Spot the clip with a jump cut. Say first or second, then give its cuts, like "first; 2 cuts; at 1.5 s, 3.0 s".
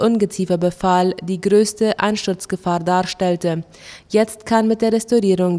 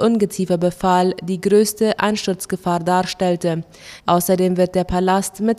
second; 1 cut; at 4.0 s